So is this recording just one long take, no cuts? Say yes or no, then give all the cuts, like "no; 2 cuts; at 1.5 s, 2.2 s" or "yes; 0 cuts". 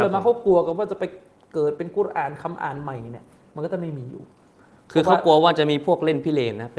yes; 0 cuts